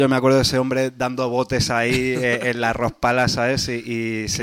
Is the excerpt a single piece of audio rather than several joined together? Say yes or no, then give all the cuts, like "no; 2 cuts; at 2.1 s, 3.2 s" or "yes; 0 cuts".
yes; 0 cuts